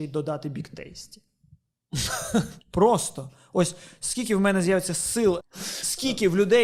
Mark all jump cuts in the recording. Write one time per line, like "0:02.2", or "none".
0:02.6
0:05.4